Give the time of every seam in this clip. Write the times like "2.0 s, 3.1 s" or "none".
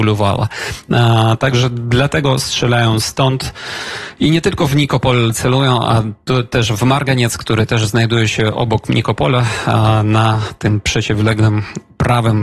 none